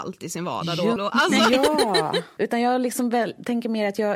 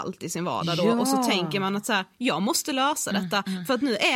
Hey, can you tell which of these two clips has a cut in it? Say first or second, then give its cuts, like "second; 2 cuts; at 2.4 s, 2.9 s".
first; 2 cuts; at 1.0 s, 2.4 s